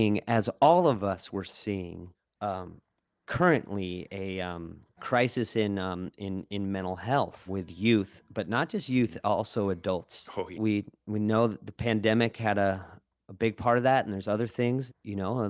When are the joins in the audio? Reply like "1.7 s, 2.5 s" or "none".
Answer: 10.5 s

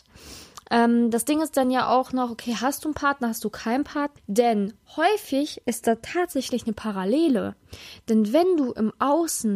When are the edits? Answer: 4.2 s

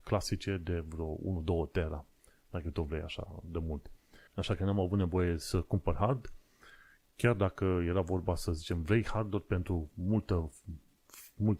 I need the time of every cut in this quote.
4.3 s

